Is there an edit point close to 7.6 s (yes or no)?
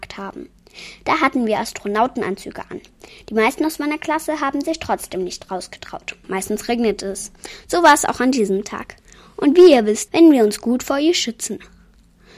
no